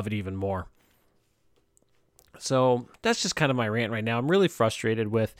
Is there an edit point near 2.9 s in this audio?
yes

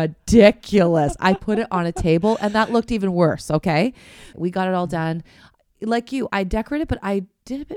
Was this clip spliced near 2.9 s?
no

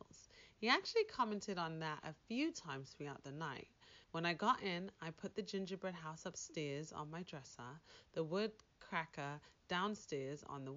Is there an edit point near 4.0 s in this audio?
yes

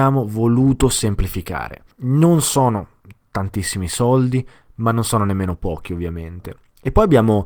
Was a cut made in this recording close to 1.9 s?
yes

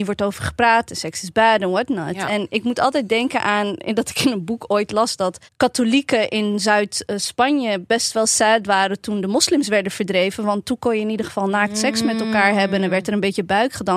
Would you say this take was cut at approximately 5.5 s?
yes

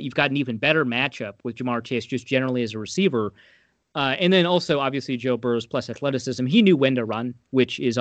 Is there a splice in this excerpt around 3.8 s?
yes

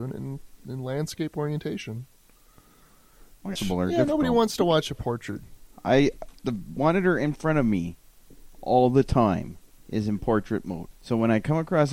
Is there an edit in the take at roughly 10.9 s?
yes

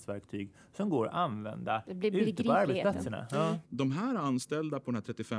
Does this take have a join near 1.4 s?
no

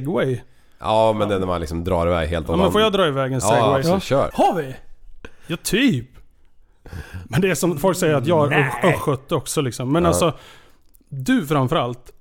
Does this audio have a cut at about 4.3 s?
yes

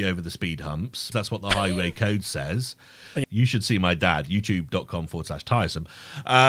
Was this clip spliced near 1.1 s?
yes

